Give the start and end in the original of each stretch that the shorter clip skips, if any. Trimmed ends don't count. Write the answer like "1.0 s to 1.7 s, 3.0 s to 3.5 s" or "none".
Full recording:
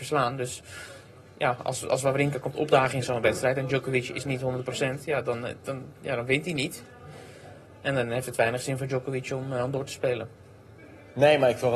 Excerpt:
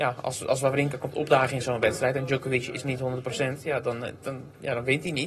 none